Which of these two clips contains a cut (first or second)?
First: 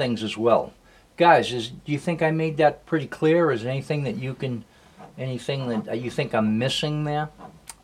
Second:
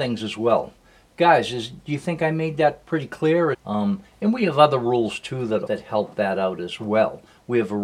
second